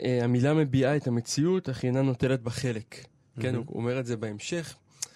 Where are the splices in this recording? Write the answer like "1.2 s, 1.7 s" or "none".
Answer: none